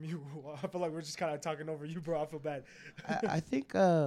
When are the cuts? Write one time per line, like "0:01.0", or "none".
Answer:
none